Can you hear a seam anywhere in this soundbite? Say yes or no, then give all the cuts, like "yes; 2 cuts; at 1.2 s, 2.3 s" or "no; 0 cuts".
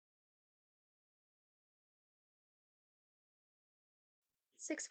no; 0 cuts